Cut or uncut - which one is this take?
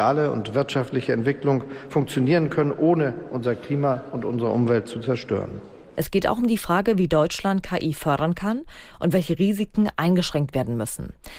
cut